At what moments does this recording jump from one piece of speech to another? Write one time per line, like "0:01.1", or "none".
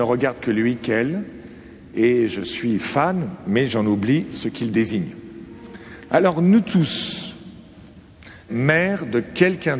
0:06.1
0:08.5

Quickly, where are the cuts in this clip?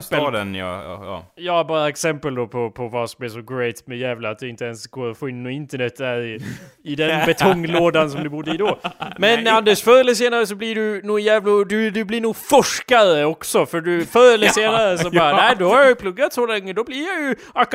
none

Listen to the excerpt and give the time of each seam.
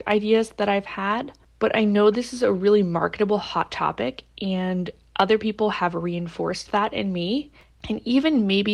0:07.7

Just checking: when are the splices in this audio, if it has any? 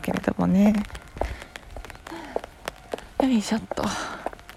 0:03.1

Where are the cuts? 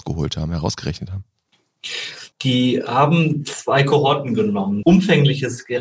0:02.3
0:04.8

